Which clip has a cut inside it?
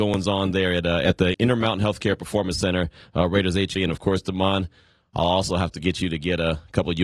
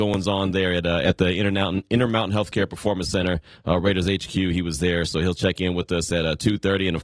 first; 2 cuts; at 1.3 s, 3.8 s

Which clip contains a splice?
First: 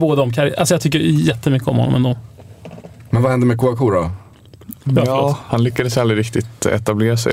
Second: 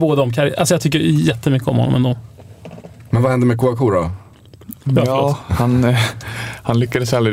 first; 1 cut; at 5.5 s

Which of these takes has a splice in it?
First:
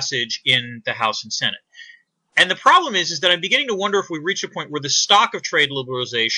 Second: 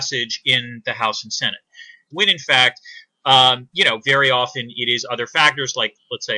second; 1 cut; at 2.1 s

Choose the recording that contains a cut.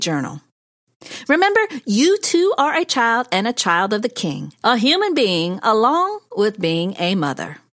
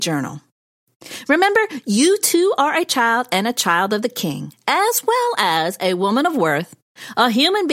first; 1 cut; at 4.6 s

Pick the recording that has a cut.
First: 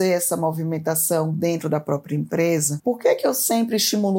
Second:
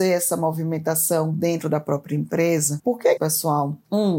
second; 1 cut; at 3.2 s

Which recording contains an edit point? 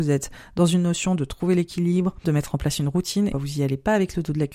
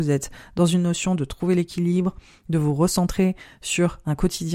first; 2 cuts; at 2.2 s, 3.3 s

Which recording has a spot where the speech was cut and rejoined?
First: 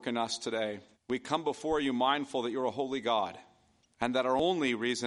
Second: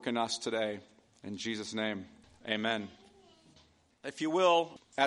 first; 1 cut; at 0.9 s

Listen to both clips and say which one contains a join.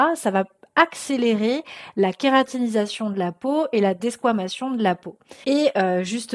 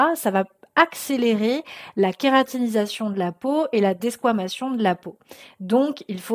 first; 1 cut; at 5.4 s

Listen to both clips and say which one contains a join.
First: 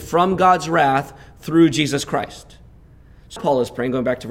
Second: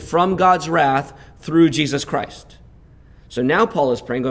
first; 1 cut; at 3.4 s

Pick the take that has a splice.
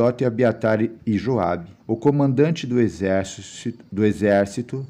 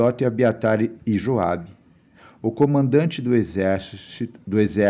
first; 1 cut; at 1.8 s

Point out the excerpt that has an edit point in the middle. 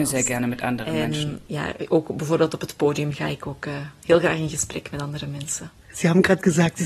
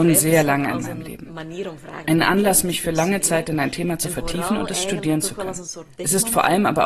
second; 1 cut; at 2.0 s

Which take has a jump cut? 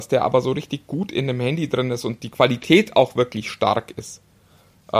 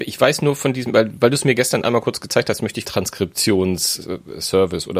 second; 1 cut; at 2.8 s

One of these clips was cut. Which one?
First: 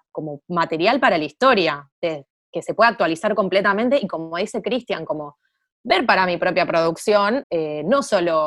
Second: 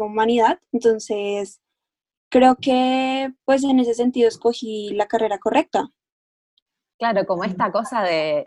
first; 2 cuts; at 1.9 s, 7.4 s

